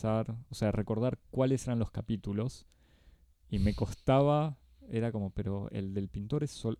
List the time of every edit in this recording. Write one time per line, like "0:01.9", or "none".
none